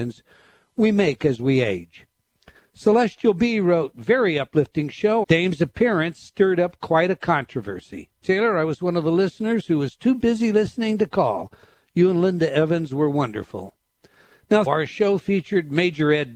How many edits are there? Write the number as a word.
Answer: three